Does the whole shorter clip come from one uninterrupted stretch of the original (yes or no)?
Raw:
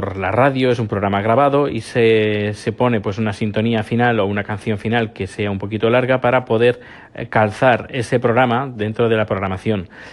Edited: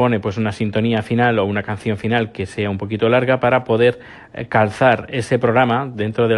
yes